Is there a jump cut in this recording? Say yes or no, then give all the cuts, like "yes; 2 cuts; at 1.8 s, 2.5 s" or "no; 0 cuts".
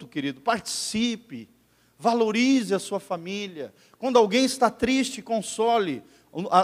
no; 0 cuts